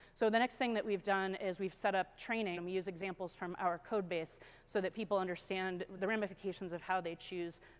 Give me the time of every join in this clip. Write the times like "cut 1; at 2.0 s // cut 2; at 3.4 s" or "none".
cut 1; at 2.6 s // cut 2; at 6.0 s